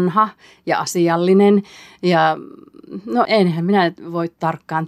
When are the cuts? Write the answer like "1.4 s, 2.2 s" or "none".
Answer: 3.3 s

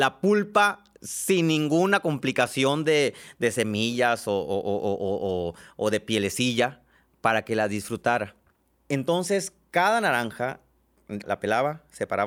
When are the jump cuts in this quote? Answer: 8.7 s, 11.2 s

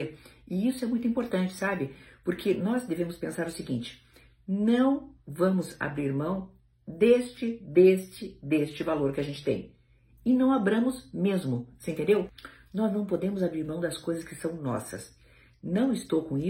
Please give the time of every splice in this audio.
none

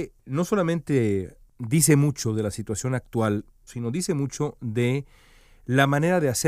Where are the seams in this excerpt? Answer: 3.7 s

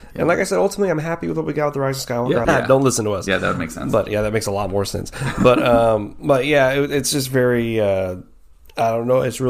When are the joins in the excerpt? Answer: 2.4 s

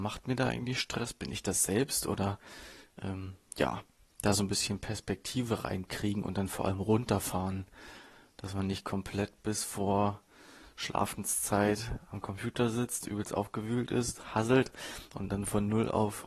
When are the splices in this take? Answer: none

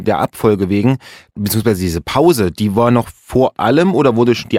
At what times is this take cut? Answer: 1.3 s

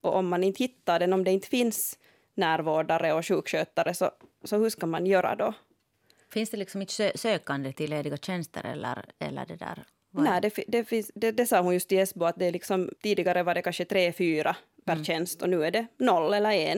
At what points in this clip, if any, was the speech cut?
7.7 s, 13.0 s

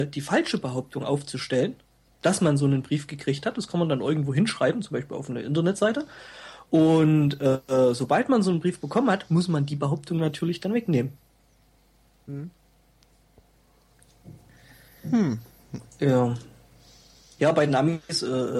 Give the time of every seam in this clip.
17.4 s

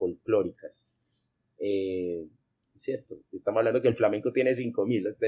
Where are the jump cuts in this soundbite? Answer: 2.6 s

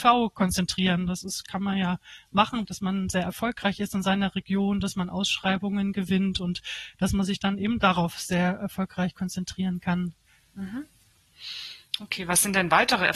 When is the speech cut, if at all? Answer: 2.6 s

